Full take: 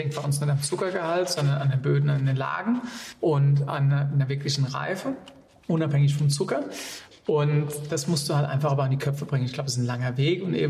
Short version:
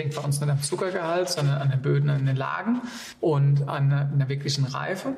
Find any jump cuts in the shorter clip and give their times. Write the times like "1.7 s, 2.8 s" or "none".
none